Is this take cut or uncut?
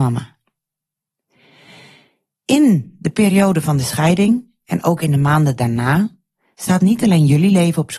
uncut